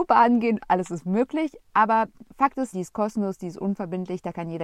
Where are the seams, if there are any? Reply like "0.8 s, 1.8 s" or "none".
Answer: 2.7 s